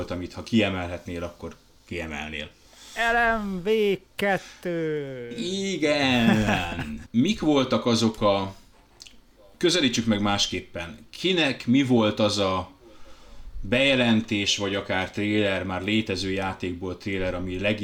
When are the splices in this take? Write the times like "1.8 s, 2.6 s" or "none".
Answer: 7.0 s